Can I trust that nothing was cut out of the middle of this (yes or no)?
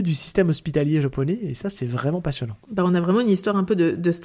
yes